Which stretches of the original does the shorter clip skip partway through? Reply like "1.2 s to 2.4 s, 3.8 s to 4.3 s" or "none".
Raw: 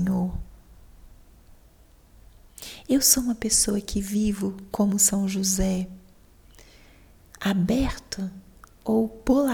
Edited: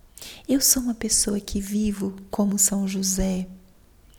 none